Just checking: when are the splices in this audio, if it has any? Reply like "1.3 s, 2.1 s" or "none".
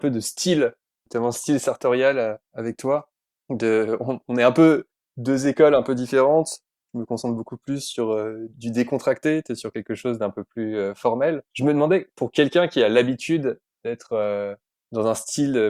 8.5 s, 11.5 s